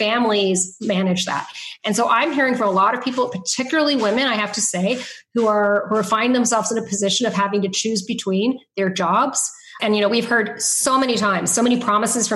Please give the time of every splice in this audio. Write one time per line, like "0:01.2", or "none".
0:09.8